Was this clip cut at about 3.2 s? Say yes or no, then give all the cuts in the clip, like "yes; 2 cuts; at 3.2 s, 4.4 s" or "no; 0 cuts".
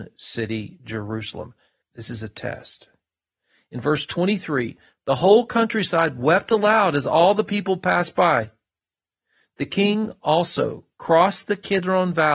no; 1 cut; at 1.8 s